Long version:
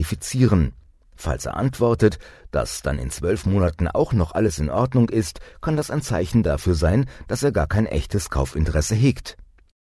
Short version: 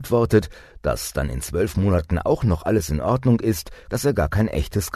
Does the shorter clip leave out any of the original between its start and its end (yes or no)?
yes